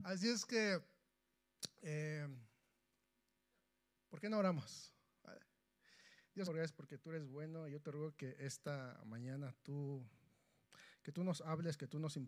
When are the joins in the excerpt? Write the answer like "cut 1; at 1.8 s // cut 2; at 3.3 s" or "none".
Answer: cut 1; at 6.5 s